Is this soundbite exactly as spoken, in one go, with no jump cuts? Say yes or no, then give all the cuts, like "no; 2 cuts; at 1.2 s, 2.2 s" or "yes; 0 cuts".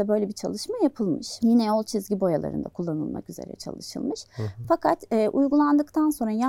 yes; 0 cuts